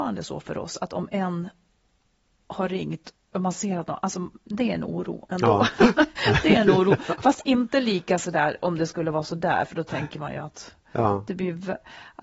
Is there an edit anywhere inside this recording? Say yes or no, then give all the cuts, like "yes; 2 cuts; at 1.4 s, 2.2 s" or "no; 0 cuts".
no; 0 cuts